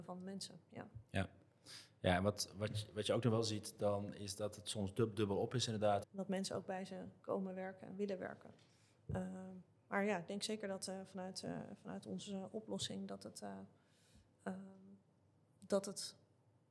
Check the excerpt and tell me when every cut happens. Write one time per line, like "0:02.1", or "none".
0:06.0